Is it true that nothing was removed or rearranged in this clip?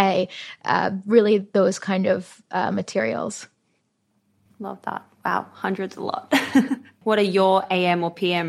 no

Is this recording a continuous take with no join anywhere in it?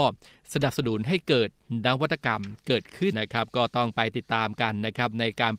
no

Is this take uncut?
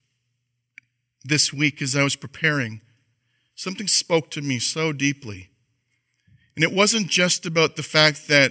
yes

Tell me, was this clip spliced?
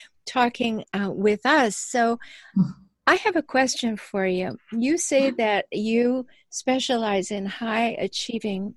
no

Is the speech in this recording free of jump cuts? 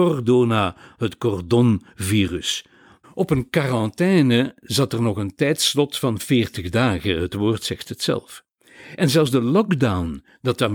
no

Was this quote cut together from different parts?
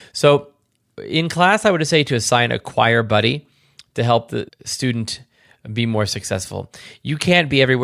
yes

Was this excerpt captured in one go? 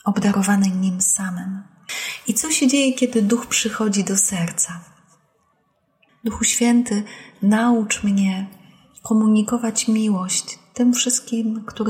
no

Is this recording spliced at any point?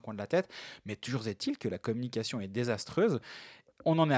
no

